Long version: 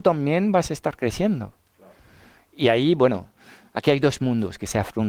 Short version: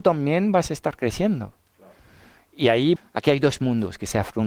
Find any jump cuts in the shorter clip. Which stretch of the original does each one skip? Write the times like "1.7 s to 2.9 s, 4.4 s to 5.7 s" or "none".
3.0 s to 3.6 s